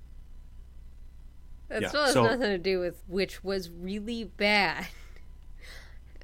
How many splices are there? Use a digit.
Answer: 1